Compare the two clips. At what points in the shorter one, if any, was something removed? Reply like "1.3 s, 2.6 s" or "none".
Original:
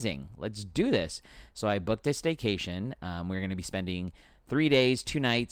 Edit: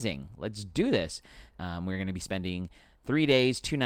1.5 s